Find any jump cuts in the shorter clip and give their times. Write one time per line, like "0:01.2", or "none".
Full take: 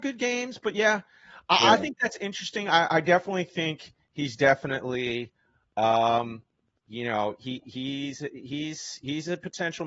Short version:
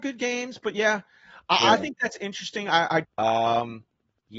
0:03.0